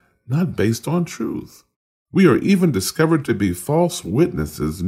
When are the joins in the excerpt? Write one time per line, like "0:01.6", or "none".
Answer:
none

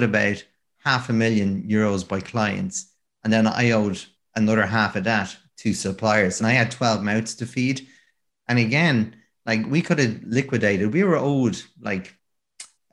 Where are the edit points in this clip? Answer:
0:06.4
0:08.3

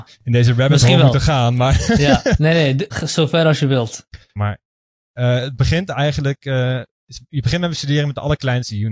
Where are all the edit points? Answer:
0:02.9
0:04.4

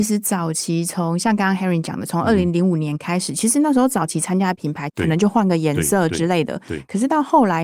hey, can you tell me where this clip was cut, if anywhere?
0:04.9

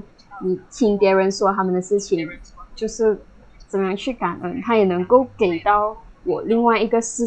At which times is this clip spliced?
0:02.7

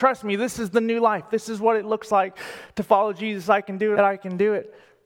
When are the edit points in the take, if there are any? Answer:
0:03.9

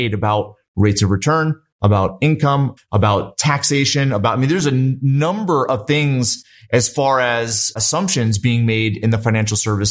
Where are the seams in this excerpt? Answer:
0:02.8

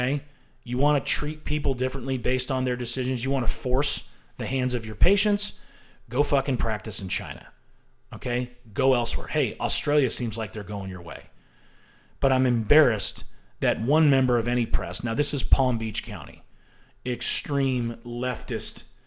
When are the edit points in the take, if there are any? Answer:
0:17.0

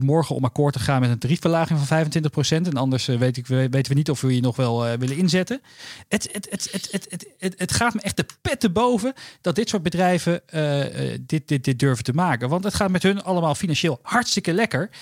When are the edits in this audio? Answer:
none

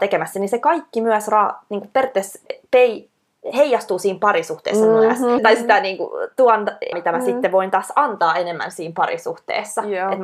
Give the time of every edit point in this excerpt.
0:02.5
0:05.4
0:06.9

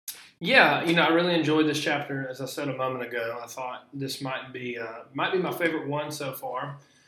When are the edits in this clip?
none

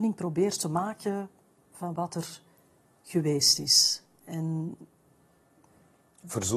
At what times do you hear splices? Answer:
none

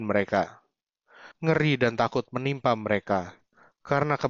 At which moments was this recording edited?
0:01.3

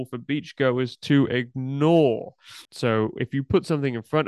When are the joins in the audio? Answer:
0:02.7

